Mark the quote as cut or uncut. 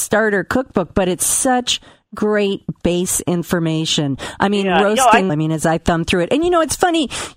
cut